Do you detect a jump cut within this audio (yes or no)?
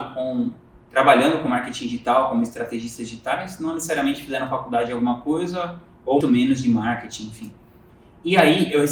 yes